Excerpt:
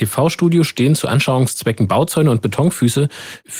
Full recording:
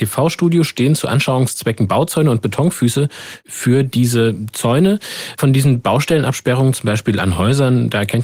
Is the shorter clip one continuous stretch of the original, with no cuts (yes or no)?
yes